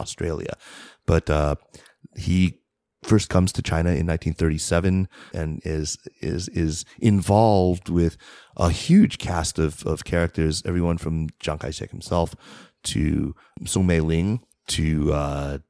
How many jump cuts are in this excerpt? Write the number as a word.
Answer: one